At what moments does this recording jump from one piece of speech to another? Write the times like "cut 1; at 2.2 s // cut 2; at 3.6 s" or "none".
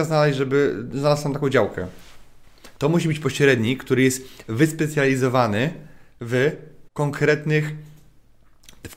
cut 1; at 2.8 s // cut 2; at 6.9 s

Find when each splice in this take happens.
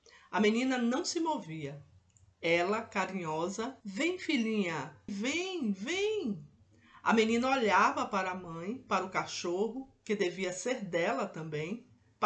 cut 1; at 3.8 s // cut 2; at 5.1 s

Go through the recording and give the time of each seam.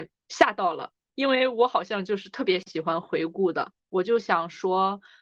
cut 1; at 3.8 s

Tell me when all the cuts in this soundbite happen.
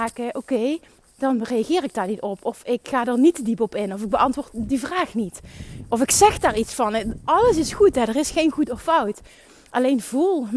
none

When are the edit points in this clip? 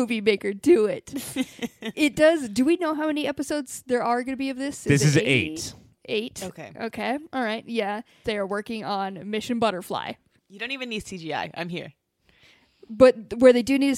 cut 1; at 8.2 s // cut 2; at 10.4 s

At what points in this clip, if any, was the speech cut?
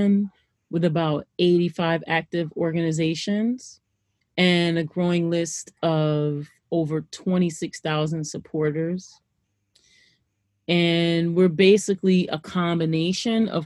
none

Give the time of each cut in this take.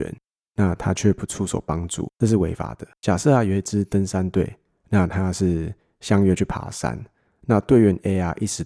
none

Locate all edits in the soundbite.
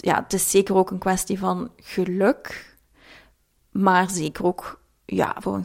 none

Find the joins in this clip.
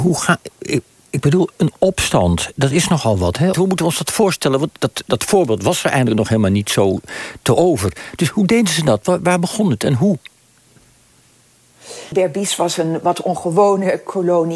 cut 1; at 3.5 s // cut 2; at 12.1 s

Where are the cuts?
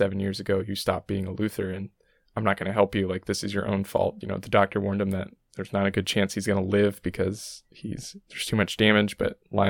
cut 1; at 4.2 s

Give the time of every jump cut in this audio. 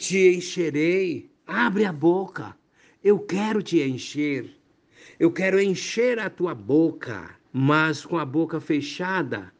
cut 1; at 1.4 s // cut 2; at 7.4 s

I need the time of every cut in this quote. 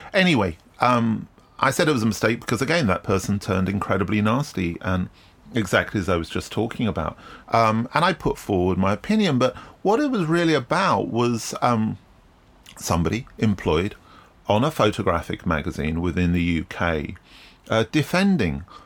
cut 1; at 7.4 s

